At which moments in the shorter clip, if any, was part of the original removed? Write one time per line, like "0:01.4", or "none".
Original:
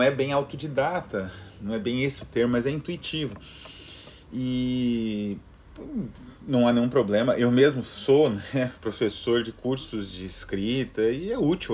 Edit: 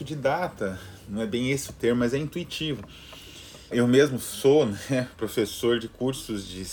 0:03.7